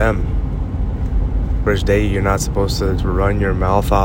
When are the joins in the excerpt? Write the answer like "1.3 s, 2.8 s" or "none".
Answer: 1.6 s, 3.0 s